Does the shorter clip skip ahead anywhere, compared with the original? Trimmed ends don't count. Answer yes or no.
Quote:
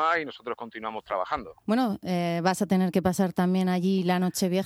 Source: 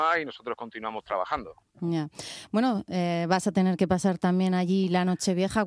yes